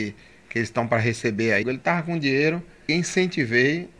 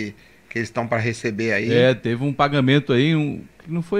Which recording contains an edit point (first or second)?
first